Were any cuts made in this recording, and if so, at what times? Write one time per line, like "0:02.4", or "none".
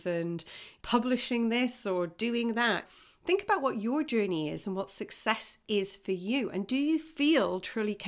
none